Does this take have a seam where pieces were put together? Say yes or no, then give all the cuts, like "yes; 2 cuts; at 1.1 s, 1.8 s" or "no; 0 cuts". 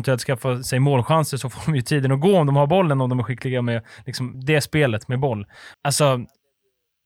yes; 2 cuts; at 4.3 s, 5.7 s